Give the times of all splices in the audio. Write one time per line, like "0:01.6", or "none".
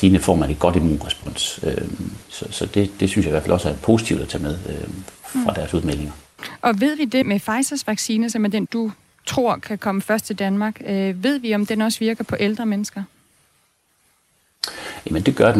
0:07.2
0:08.7

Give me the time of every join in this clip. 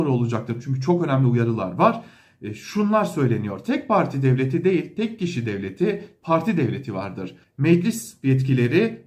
0:06.2
0:07.4

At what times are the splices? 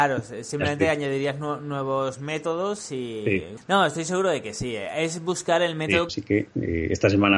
0:03.6
0:06.1

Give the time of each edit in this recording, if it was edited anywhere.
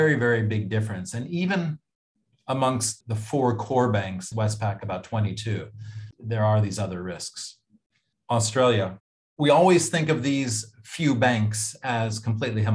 0:04.3
0:06.1

